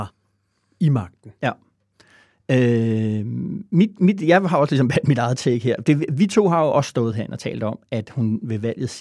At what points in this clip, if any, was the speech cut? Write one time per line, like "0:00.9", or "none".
none